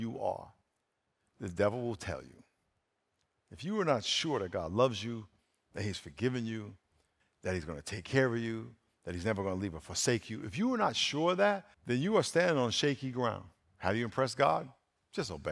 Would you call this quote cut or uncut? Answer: cut